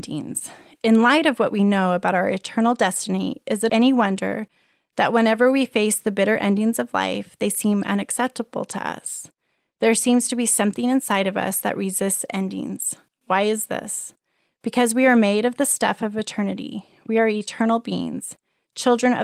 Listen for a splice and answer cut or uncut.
uncut